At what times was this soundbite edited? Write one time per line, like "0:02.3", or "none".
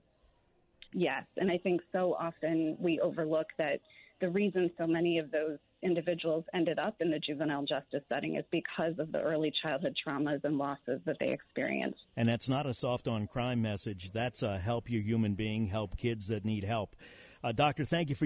0:00.9
0:12.0